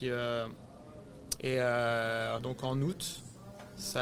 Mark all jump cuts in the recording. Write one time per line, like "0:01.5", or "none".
0:01.4
0:02.4